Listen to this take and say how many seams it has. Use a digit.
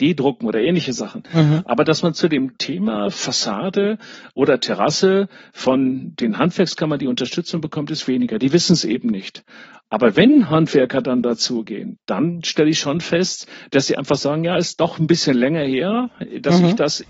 0